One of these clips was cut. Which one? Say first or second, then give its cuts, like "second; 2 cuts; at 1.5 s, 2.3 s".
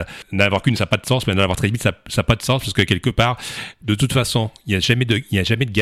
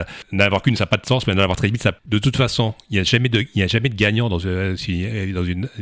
second; 1 cut; at 2.0 s